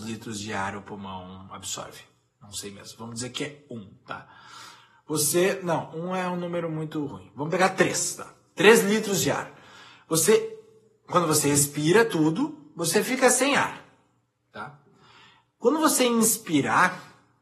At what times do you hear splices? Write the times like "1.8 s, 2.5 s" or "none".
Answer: none